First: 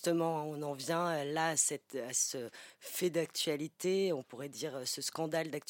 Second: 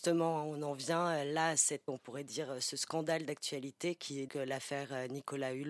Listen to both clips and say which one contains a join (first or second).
second